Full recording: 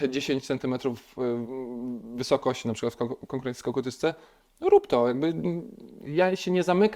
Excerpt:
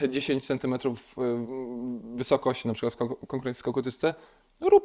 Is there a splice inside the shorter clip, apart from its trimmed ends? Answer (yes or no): no